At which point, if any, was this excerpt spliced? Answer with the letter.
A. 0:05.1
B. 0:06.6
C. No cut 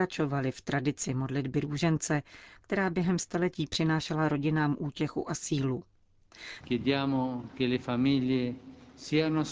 B